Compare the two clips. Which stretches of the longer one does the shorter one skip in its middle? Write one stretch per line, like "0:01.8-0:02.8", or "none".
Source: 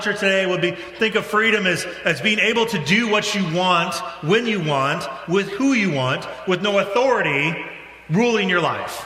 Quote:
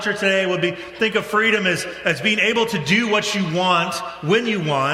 none